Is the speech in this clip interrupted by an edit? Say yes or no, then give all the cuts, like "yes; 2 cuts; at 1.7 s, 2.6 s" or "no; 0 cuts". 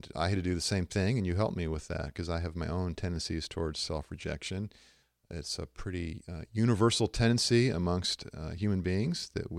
no; 0 cuts